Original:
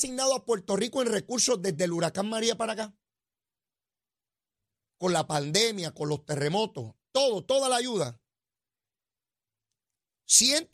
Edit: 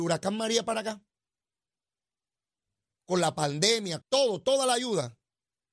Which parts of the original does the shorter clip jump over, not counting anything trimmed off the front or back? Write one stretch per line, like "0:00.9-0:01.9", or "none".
0:05.9-0:07.0